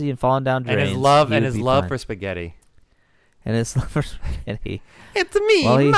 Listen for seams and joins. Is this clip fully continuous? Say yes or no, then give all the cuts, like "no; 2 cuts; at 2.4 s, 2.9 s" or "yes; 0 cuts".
yes; 0 cuts